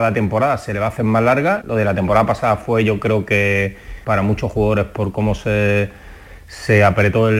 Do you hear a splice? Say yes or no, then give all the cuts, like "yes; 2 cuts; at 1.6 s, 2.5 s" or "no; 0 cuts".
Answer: yes; 2 cuts; at 1.6 s, 4.0 s